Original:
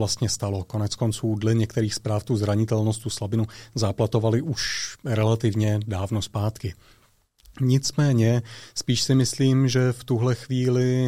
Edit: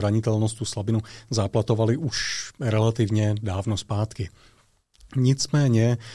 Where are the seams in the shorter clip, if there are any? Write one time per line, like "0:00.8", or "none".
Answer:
none